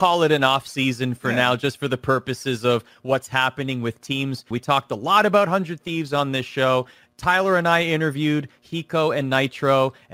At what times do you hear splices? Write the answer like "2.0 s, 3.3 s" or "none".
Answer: 4.5 s

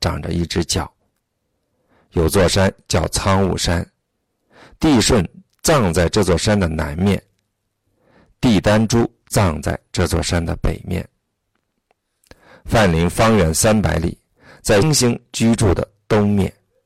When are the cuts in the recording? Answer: 14.8 s

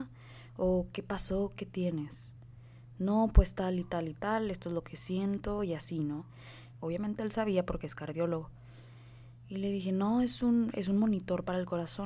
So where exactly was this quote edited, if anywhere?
6.7 s

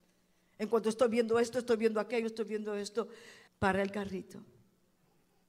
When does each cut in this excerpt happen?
2.2 s, 3.5 s

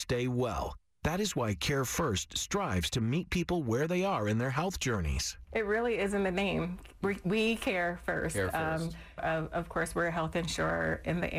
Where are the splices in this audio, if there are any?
9.2 s

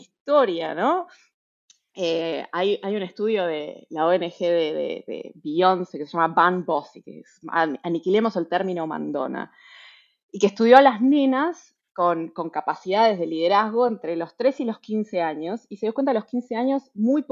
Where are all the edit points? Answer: none

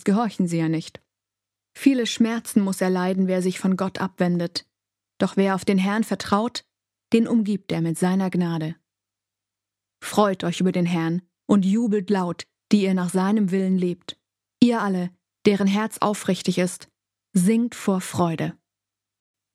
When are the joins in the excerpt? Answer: none

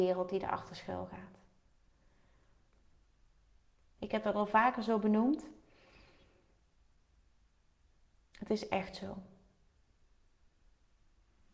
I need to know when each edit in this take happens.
4.0 s

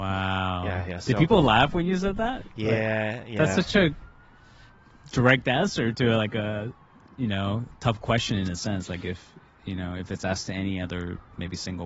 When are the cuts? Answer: none

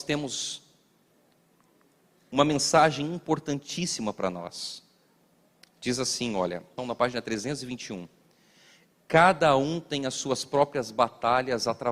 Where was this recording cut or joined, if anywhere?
6.8 s

